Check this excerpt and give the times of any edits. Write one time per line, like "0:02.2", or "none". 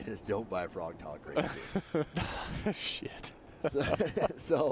0:02.1